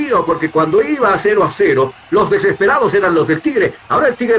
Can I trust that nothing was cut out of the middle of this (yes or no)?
yes